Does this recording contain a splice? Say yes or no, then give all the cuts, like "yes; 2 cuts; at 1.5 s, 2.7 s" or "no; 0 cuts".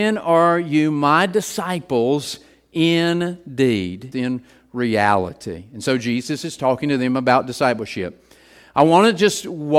yes; 1 cut; at 4.1 s